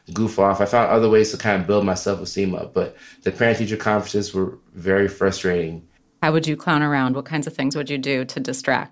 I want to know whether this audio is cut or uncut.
uncut